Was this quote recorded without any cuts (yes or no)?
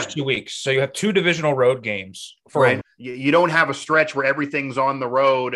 no